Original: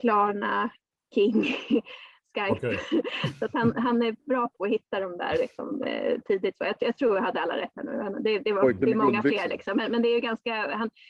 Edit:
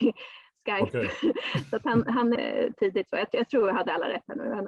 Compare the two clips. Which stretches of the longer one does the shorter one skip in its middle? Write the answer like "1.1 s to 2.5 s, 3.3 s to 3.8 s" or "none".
4.0 s to 5.8 s